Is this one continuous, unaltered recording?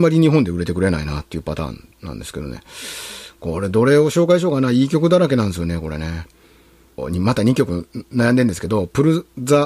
yes; 0 cuts

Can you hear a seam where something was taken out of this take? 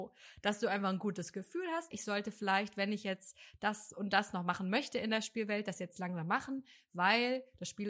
yes; 1 cut; at 1.9 s

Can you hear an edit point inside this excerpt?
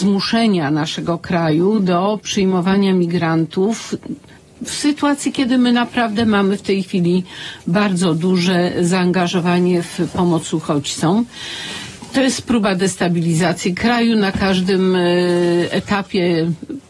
no; 0 cuts

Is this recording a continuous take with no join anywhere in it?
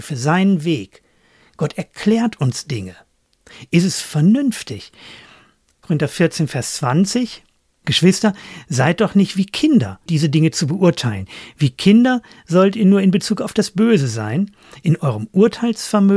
no; 2 cuts; at 5.8 s, 10.1 s

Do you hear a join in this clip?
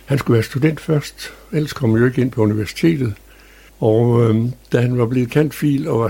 yes; 1 cut; at 3.7 s

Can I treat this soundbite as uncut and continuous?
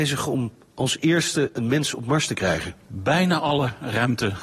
yes; 0 cuts

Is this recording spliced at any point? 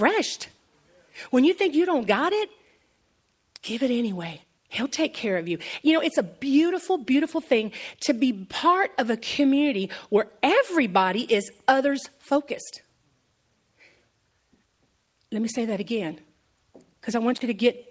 yes; 1 cut; at 4.6 s

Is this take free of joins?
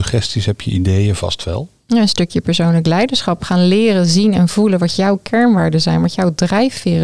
yes; 0 cuts

